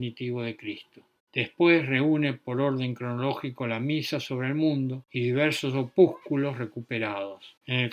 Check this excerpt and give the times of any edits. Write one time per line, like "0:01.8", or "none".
0:01.2